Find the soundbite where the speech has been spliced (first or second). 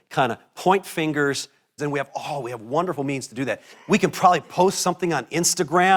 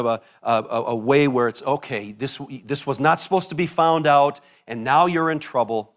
first